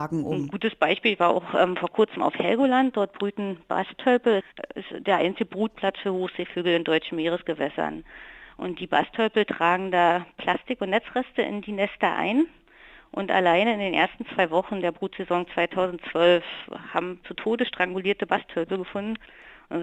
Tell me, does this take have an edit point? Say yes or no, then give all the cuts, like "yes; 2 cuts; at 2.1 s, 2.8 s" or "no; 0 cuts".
yes; 1 cut; at 17.2 s